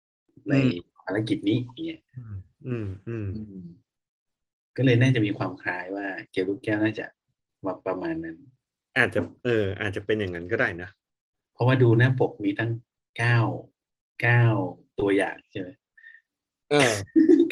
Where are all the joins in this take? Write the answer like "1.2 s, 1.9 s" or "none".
none